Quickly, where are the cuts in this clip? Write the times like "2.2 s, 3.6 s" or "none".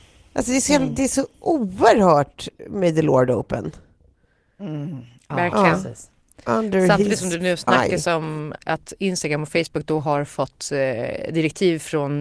8.6 s